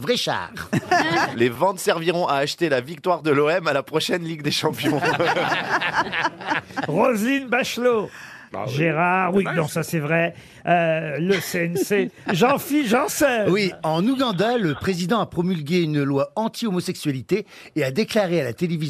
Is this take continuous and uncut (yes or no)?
no